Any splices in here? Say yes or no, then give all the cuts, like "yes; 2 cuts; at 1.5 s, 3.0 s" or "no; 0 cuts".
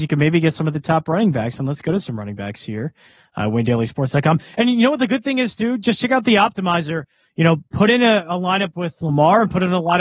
no; 0 cuts